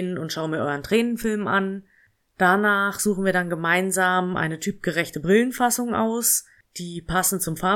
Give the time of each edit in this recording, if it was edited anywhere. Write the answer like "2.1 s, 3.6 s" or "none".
none